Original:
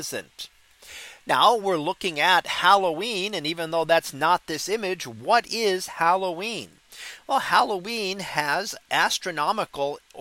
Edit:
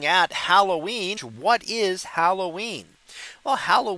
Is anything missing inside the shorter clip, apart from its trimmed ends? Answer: yes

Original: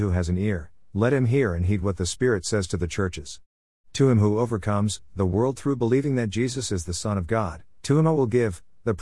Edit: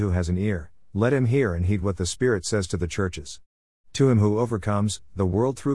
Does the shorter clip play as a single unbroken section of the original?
yes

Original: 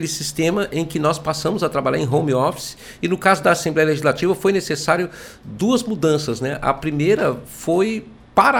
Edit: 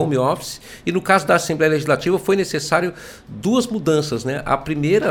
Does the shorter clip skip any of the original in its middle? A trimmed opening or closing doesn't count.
no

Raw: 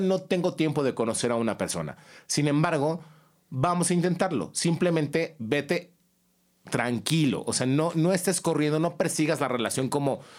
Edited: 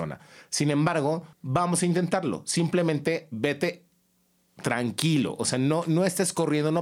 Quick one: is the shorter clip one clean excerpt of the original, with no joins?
no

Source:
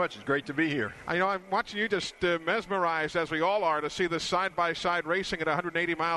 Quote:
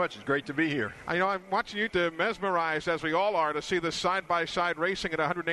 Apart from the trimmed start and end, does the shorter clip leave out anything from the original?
yes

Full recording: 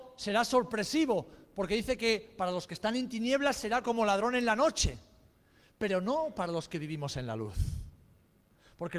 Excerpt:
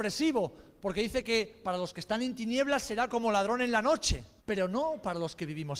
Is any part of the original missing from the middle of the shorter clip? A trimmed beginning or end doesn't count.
yes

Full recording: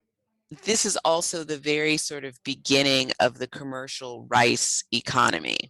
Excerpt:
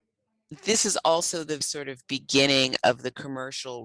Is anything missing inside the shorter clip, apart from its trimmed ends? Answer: yes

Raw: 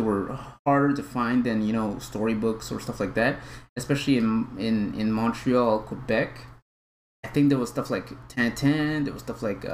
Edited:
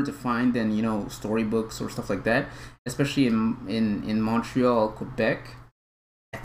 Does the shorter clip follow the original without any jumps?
yes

